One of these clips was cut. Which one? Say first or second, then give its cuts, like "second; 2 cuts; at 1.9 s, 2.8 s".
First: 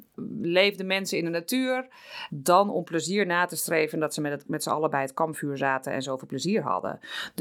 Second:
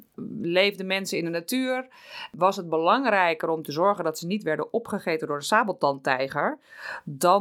first; 2 cuts; at 2.3 s, 4.5 s